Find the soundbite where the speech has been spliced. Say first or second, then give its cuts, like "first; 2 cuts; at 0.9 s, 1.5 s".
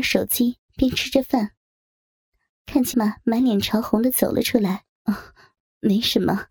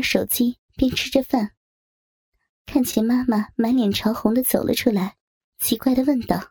first; 2 cuts; at 2.9 s, 5.0 s